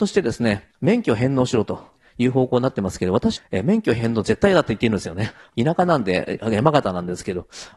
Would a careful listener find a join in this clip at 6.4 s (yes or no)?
no